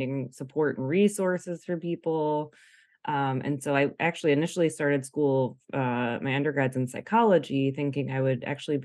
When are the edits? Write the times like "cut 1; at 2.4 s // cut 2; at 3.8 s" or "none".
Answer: none

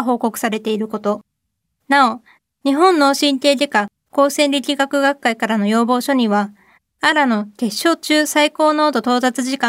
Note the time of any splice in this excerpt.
none

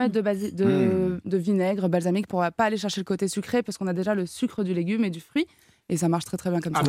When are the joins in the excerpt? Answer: cut 1; at 2.3 s

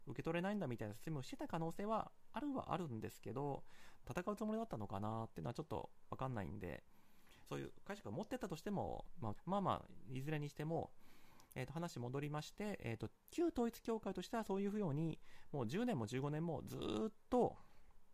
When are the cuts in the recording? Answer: cut 1; at 4.0 s // cut 2; at 7.5 s // cut 3; at 9.4 s

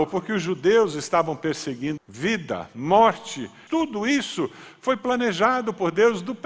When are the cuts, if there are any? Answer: cut 1; at 2.0 s // cut 2; at 3.7 s

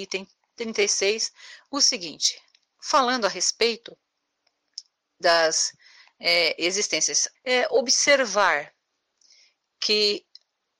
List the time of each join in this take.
cut 1; at 7.3 s

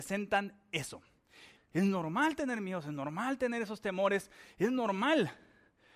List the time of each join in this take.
cut 1; at 1.6 s

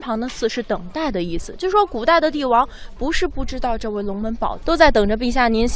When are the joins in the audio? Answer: cut 1; at 4.6 s

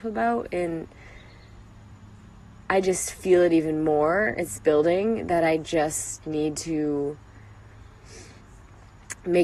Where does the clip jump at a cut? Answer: none

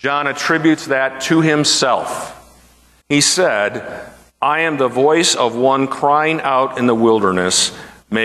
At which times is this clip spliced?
cut 1; at 3.0 s

